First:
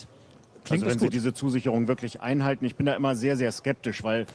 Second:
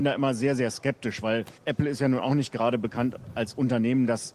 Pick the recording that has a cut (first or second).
second